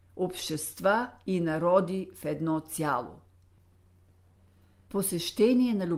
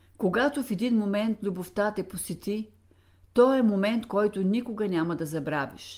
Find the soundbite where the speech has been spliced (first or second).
first